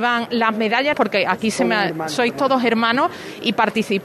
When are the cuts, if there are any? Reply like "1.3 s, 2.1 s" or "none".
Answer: 0.9 s